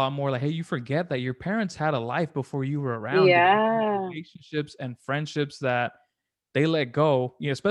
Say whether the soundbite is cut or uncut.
uncut